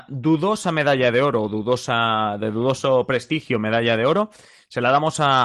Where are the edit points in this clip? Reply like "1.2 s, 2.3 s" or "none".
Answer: none